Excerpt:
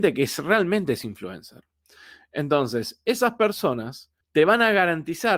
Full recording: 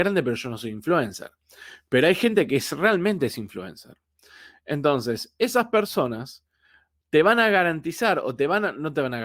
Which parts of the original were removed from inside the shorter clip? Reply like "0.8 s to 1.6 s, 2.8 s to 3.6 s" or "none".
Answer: 6.5 s to 7.0 s